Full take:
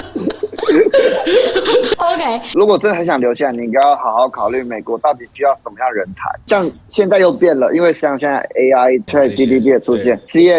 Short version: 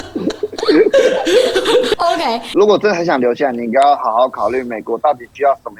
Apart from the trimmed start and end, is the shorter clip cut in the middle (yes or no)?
no